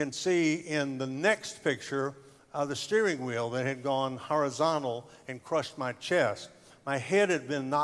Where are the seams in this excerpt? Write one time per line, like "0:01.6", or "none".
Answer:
none